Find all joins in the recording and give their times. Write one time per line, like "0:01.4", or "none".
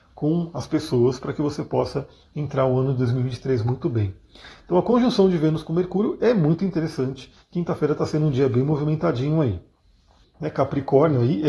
0:07.4
0:10.2